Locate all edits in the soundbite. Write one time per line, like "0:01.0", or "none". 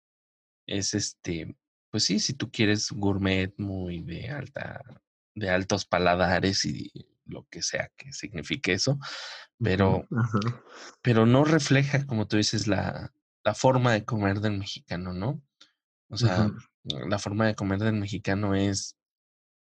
none